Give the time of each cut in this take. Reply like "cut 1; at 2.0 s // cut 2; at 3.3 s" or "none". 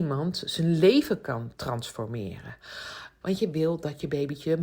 cut 1; at 3.2 s

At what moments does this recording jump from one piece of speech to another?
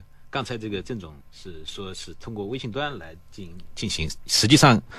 cut 1; at 1.2 s

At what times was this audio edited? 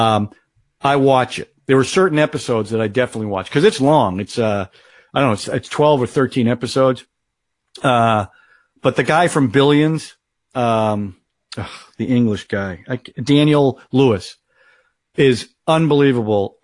none

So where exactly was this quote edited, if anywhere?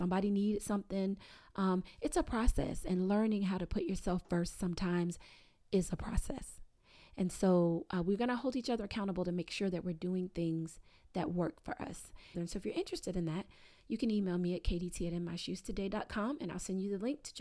cut 1; at 12.3 s

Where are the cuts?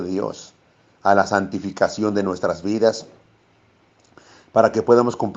none

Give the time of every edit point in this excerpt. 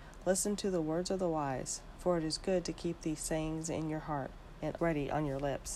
cut 1; at 2.0 s // cut 2; at 4.8 s

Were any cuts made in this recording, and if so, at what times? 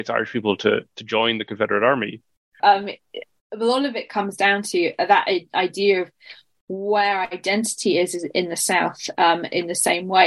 cut 1; at 2.6 s

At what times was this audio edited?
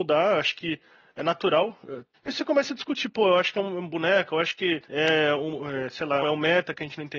cut 1; at 2.1 s // cut 2; at 4.9 s // cut 3; at 6.2 s

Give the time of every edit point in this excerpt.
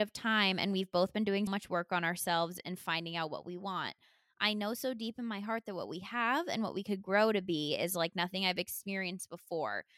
cut 1; at 1.5 s

